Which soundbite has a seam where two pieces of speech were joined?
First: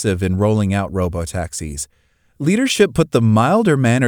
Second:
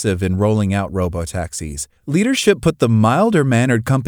second; 1 cut; at 2.0 s

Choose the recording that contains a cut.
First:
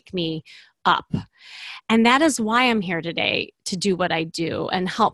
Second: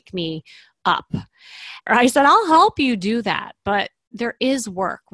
second; 1 cut; at 1.9 s

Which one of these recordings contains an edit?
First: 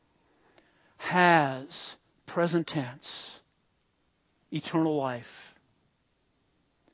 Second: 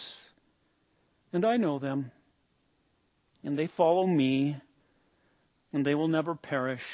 second; 1 cut; at 5.6 s

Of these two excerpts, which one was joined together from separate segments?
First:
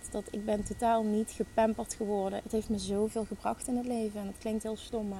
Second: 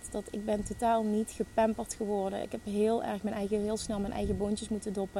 first; 1 cut; at 2.4 s

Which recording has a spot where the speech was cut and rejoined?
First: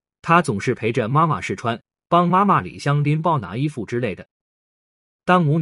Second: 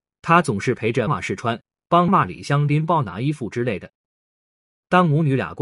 second; 2 cuts; at 1.1 s, 2.1 s

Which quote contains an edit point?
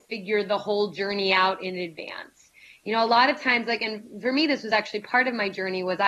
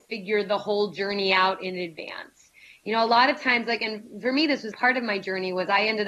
second; 1 cut; at 4.7 s

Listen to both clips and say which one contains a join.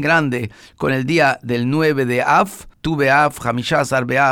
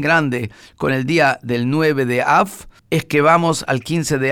first; 1 cut; at 2.7 s

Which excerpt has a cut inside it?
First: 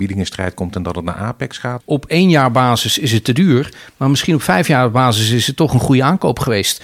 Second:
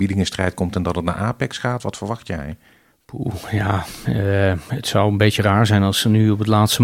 first; 1 cut; at 1.8 s

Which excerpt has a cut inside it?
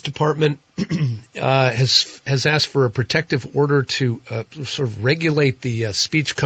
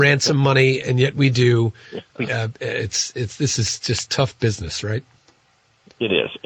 second; 2 cuts; at 2.3 s, 4.1 s

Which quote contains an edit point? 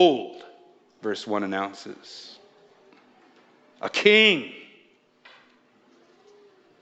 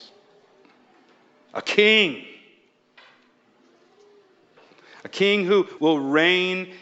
second; 1 cut; at 5.8 s

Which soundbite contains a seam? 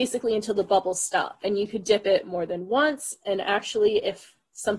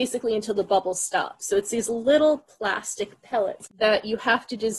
second; 1 cut; at 1.4 s

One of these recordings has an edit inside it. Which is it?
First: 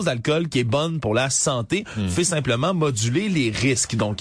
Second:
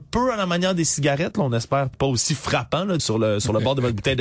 second; 2 cuts; at 1.9 s, 3.0 s

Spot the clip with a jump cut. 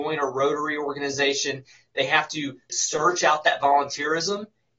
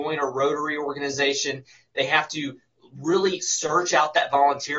first; 1 cut; at 2.7 s

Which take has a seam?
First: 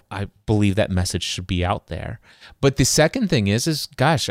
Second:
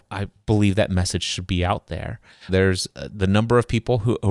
second; 1 cut; at 2.5 s

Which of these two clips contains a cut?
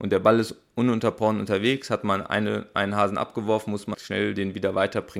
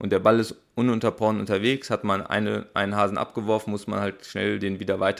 first; 1 cut; at 3.9 s

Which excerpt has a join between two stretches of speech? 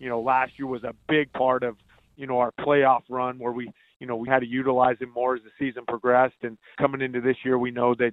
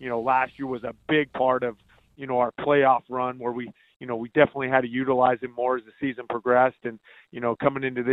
first; 2 cuts; at 4.3 s, 6.8 s

